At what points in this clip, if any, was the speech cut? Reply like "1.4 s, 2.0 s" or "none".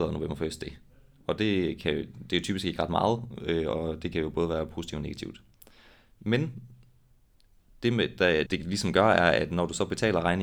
8.5 s